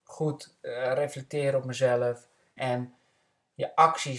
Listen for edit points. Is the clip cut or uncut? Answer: cut